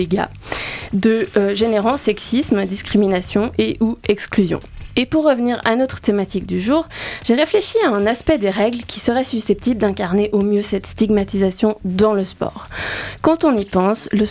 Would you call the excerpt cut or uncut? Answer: uncut